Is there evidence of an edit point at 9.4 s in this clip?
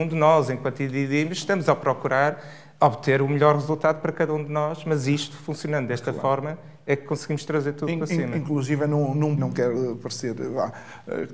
yes; 1 cut; at 9.4 s

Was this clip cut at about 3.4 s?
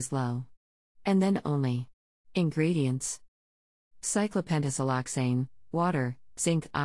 no; 2 cuts; at 2.2 s, 5.7 s

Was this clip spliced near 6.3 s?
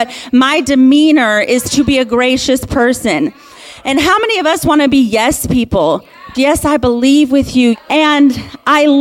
yes; 2 cuts; at 6.3 s, 7.7 s

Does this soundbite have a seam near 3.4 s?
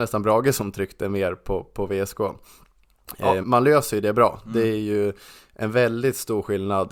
yes; 1 cut; at 3.4 s

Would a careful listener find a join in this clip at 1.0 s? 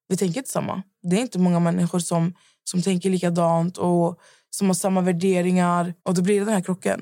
no; 1 cut; at 6.0 s

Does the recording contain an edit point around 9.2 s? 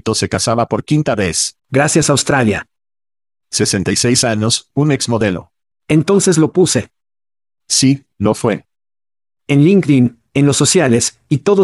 no; 2 cuts; at 1.6 s, 5.7 s

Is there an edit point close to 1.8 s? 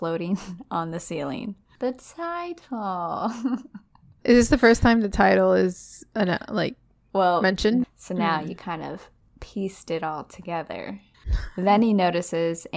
yes; 3 cuts; at 1.8 s, 7.8 s, 11.1 s

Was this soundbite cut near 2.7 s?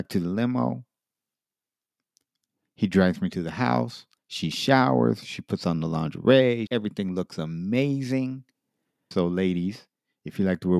no; 3 cuts; at 4.2 s, 6.7 s, 9.1 s

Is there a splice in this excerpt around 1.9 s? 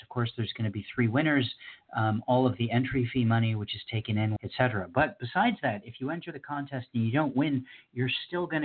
no; 1 cut; at 4.4 s

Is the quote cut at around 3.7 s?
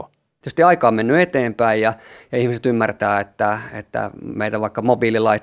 no; 0 cuts

